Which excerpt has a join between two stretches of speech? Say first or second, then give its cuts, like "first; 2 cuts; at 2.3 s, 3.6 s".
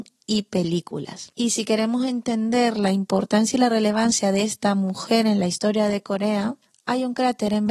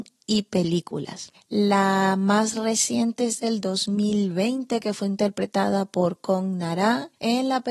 second; 1 cut; at 1.3 s